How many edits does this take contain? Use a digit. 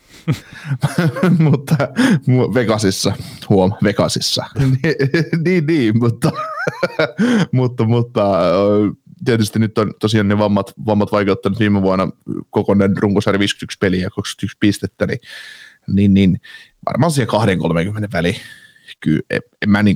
1